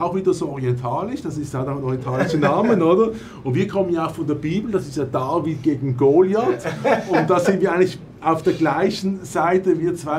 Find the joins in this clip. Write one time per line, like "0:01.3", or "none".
none